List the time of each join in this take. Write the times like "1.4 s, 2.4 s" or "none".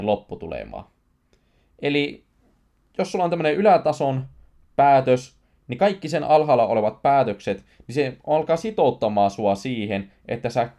none